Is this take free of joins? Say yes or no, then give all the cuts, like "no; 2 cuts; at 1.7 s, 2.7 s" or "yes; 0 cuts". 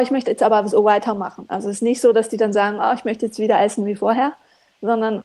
yes; 0 cuts